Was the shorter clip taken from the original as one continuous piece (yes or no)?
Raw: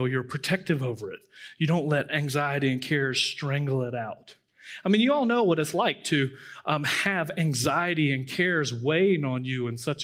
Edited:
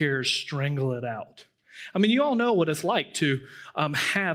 yes